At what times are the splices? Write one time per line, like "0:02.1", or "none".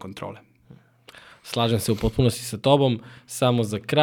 none